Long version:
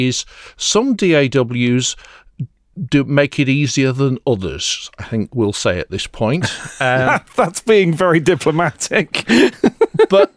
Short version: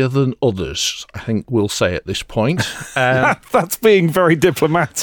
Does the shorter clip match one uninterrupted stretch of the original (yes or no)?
yes